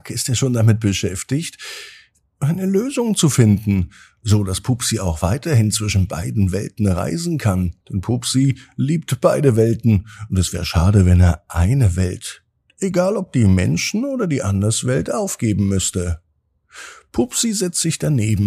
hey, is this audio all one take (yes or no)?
no